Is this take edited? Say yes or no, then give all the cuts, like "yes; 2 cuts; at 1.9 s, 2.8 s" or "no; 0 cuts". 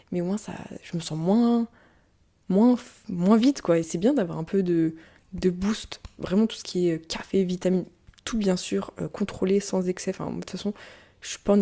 yes; 1 cut; at 3.8 s